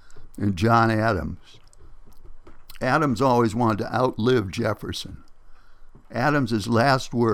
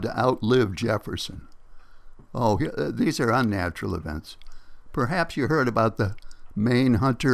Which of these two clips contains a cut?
second; 1 cut; at 2.3 s

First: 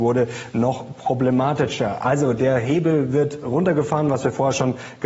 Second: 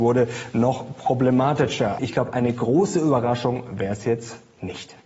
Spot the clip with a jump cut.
second; 1 cut; at 2.0 s

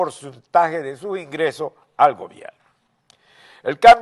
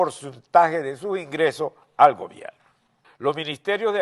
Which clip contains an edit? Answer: second; 1 cut; at 3.0 s

